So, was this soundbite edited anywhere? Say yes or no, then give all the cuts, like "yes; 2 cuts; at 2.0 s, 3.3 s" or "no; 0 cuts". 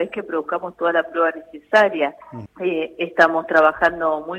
yes; 1 cut; at 2.5 s